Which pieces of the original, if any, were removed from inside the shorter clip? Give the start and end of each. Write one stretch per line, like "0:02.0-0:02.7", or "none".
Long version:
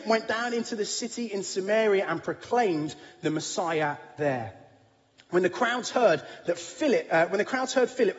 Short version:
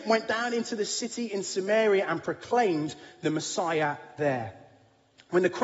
none